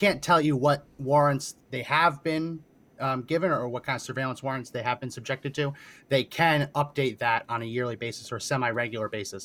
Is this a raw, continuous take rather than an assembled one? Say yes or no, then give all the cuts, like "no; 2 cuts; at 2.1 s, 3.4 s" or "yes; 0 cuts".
yes; 0 cuts